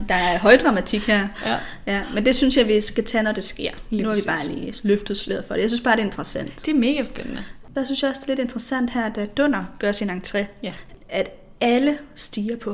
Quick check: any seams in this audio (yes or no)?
no